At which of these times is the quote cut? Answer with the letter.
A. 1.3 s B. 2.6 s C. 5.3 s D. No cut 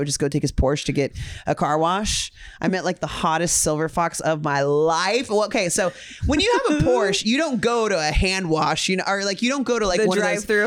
D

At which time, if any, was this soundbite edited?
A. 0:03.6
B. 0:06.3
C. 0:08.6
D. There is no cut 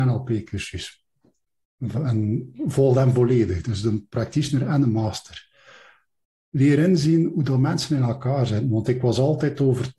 D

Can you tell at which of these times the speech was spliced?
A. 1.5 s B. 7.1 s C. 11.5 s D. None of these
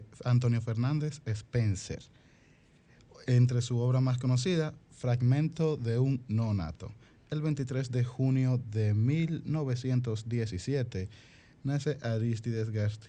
D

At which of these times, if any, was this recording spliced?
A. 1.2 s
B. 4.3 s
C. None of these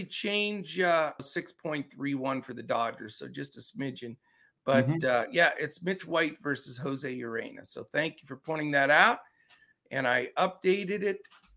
A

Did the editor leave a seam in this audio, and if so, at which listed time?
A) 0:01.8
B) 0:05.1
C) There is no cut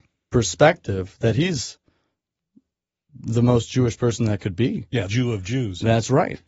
B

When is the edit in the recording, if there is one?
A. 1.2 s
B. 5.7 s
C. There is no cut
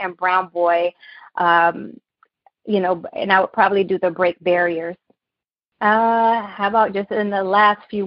B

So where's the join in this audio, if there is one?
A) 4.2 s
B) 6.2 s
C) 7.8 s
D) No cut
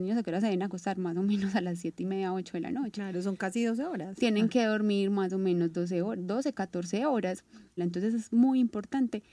C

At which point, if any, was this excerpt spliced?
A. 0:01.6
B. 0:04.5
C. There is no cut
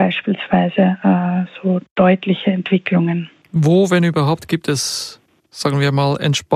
C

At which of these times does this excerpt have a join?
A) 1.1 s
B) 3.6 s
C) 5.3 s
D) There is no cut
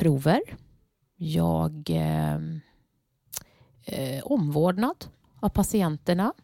D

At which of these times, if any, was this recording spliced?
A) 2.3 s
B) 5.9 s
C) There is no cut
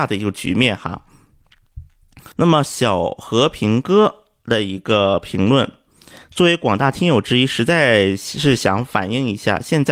A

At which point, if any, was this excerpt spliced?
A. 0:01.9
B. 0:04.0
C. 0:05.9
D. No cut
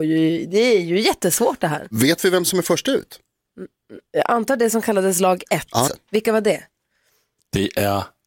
C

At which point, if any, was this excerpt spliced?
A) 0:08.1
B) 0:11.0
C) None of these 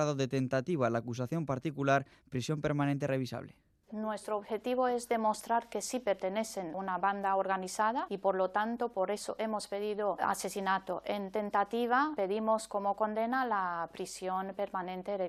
A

